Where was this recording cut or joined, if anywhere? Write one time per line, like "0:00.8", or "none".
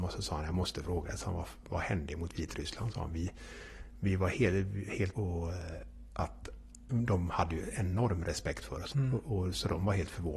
0:05.1
0:08.9